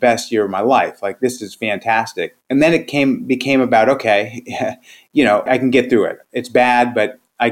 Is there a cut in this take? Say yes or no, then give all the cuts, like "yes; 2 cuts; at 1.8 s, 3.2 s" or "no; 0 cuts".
yes; 2 cuts; at 2.4 s, 5.5 s